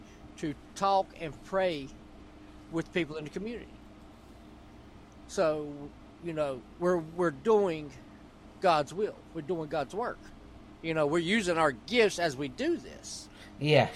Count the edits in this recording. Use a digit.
0